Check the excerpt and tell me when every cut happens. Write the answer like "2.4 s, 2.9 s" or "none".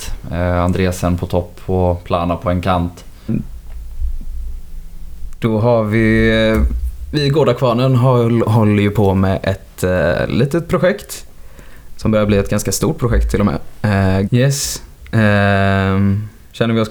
3.3 s, 14.3 s